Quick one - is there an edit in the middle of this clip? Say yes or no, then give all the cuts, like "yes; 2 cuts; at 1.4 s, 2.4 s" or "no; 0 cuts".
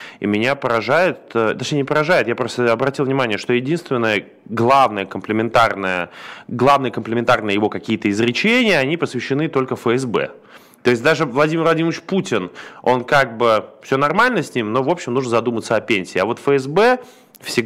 no; 0 cuts